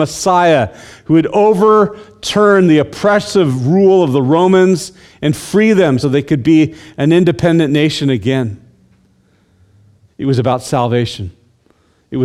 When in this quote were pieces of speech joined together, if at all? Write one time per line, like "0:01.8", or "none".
0:06.0
0:10.1